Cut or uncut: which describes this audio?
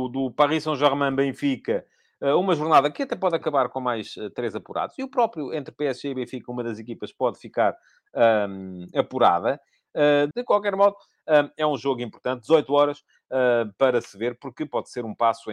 cut